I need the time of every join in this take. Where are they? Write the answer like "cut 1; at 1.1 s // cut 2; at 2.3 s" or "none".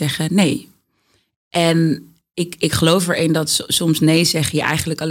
none